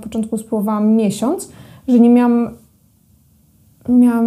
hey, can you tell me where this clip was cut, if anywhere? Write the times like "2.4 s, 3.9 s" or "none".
none

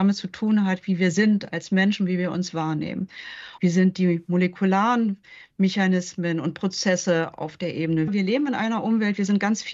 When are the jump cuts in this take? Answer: 3.6 s, 8.1 s

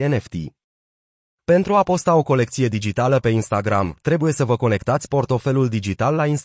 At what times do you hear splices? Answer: none

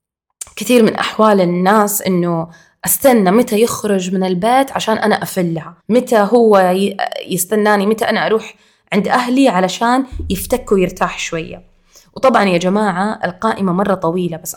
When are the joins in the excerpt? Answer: 5.8 s

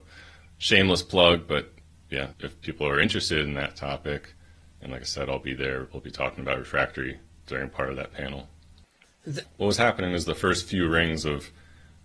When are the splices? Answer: 2.3 s, 9.4 s

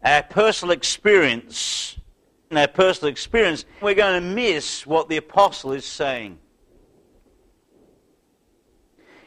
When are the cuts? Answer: 2.5 s, 3.8 s

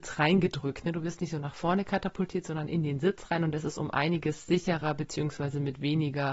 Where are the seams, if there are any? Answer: none

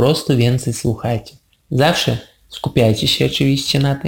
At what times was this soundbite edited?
none

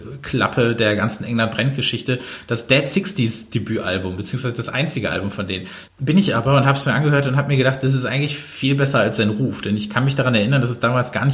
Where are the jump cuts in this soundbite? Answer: 5.9 s

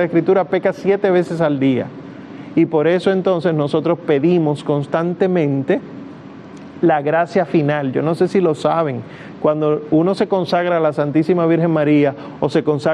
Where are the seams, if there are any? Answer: none

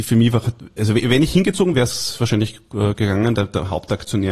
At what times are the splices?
1.7 s, 3.3 s

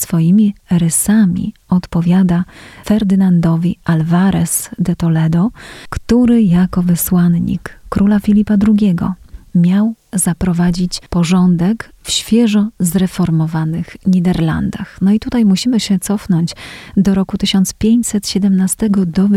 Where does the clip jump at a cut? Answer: none

